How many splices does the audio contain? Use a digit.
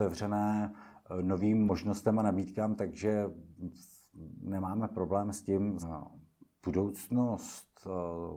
1